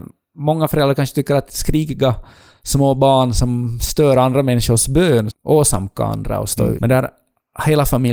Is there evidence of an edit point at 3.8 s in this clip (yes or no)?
no